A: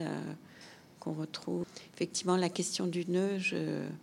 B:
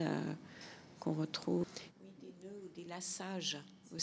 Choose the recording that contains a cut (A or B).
B